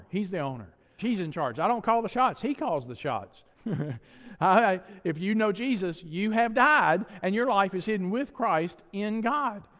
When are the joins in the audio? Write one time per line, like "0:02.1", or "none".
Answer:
0:01.0
0:03.5